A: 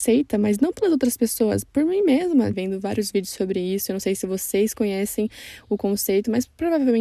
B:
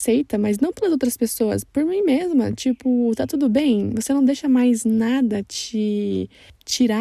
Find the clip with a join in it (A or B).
A